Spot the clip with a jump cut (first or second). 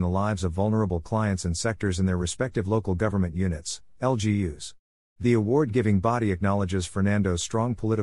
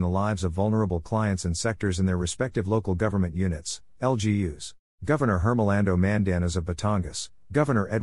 second